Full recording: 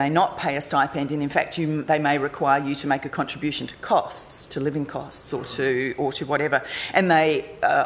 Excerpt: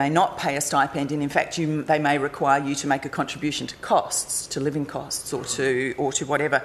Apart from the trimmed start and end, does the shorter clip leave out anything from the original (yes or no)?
no